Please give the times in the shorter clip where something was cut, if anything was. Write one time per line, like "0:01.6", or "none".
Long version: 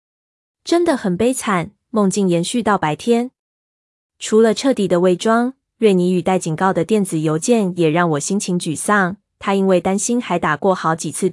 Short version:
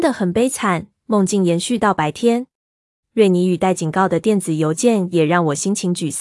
0:03.0